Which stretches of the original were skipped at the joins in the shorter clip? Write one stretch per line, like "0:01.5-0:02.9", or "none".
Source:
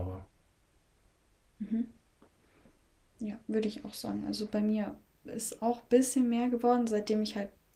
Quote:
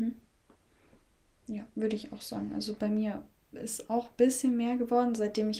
none

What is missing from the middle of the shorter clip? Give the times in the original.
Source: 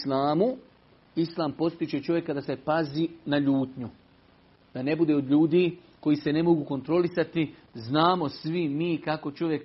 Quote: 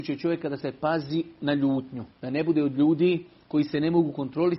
0:04.0-0:04.6

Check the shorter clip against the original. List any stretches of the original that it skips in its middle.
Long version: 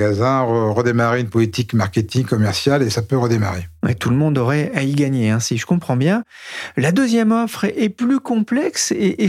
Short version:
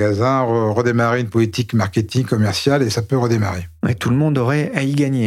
none

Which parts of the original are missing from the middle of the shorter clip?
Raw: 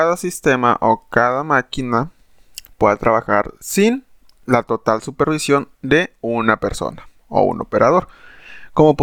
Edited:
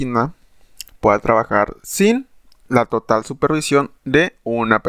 none

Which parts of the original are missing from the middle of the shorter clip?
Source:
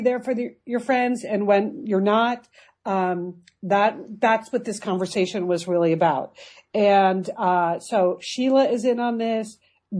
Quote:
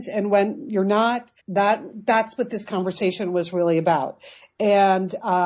0:02.6-0:03.5

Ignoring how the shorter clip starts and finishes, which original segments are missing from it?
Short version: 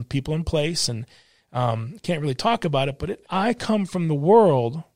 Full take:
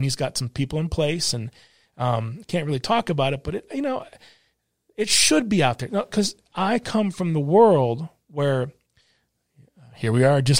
0:03.7-0:06.5

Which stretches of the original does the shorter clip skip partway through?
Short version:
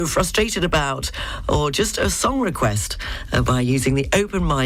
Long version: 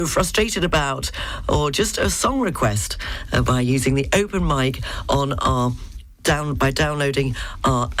none

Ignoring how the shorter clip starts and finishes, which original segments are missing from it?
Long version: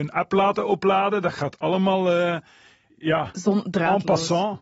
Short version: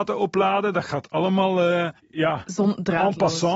0:02.5-0:02.9

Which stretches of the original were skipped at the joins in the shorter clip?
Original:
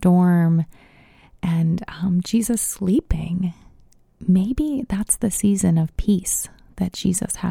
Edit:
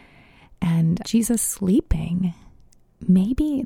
0:01.8-0:02.2

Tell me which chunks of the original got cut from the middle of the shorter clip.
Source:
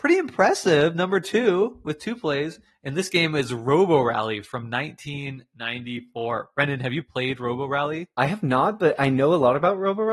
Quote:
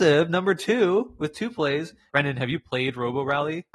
0:02.7-0:06.5

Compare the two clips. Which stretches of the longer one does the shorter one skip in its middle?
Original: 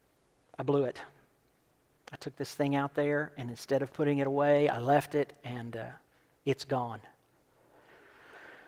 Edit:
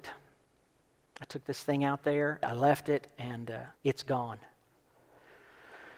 0:03.3-0:04.7
0:06.0-0:06.4

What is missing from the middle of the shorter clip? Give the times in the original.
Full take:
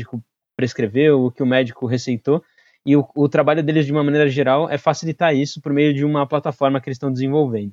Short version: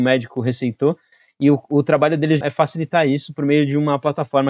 0:03.9-0:04.7

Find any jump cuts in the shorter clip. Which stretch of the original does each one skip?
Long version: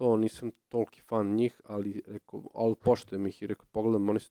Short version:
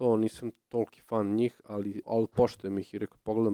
0:02.0-0:02.5

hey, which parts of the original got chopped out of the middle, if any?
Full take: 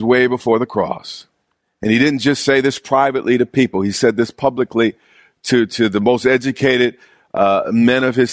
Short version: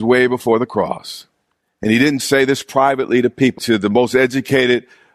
0:02.2-0:02.4
0:03.7-0:05.7

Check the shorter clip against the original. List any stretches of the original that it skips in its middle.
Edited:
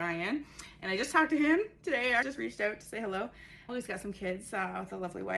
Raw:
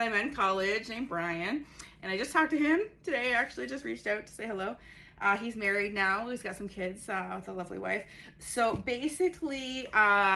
0:03.4-0:03.7
0:05.1-0:06.2

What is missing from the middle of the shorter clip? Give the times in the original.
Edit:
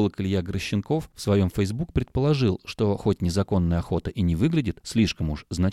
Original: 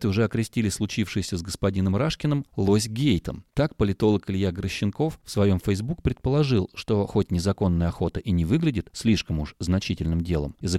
none

